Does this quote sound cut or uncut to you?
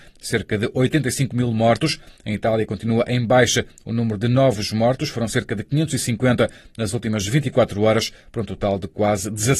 uncut